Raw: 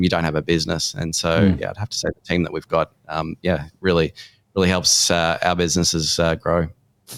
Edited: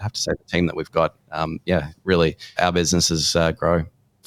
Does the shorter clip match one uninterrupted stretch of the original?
no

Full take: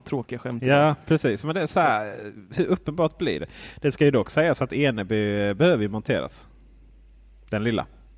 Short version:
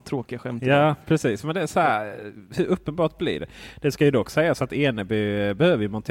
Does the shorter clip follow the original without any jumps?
yes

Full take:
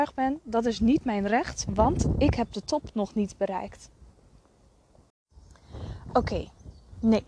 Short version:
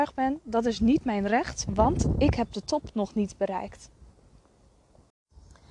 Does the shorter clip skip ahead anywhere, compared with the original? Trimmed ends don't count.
no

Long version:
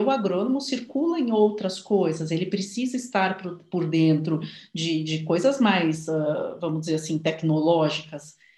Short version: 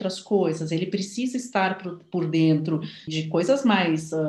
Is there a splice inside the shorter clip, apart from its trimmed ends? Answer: yes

